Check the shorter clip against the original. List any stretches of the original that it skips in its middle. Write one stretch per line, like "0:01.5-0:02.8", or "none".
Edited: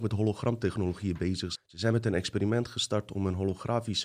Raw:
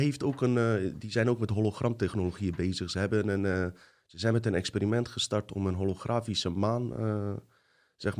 0:02.9-0:04.0